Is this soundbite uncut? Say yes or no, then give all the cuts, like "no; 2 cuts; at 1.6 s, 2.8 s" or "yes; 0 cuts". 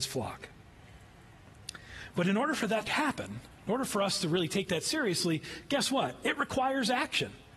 no; 1 cut; at 2.9 s